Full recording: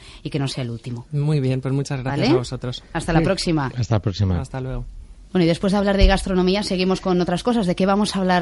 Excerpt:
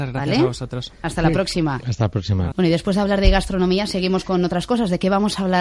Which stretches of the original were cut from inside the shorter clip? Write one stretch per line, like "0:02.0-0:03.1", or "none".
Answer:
0:04.4-0:05.3

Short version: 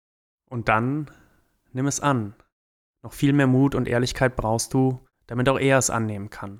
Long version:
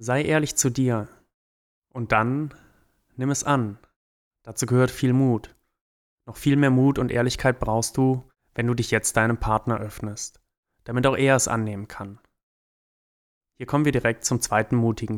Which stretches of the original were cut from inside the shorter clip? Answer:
0:04.3-0:06.1
0:08.4-0:10.7

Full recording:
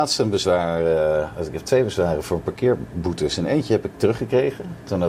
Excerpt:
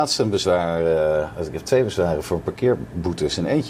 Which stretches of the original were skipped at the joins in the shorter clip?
none

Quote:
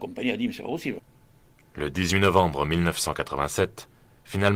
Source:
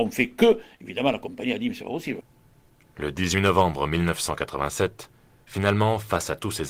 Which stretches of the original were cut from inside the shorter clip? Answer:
none

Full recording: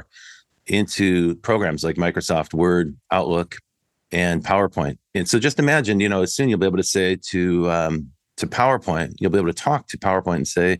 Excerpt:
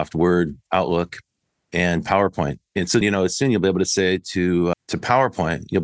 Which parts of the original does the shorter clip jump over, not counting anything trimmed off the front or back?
0:05.4-0:06.0
0:07.7-0:08.2

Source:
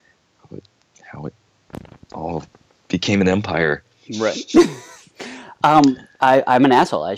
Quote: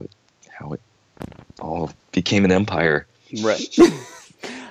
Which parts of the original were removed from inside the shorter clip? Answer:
0:02.5-0:02.8

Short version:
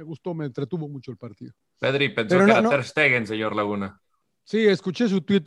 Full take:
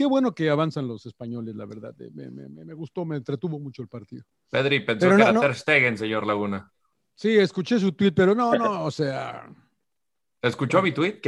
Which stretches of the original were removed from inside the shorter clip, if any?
none

